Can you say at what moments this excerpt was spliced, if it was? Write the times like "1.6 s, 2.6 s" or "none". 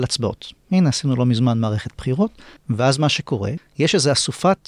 2.6 s, 3.6 s